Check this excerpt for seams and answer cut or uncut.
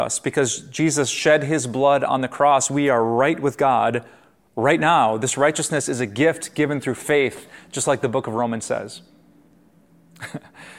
uncut